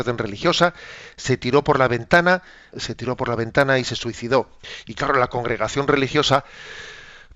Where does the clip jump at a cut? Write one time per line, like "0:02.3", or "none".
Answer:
0:02.7